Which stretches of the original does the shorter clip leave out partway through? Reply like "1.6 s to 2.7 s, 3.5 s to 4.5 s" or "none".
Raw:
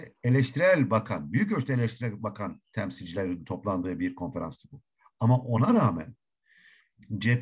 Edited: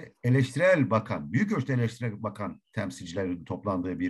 none